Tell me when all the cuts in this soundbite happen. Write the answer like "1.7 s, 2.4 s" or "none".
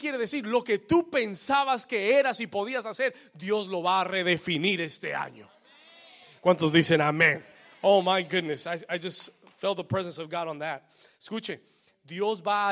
none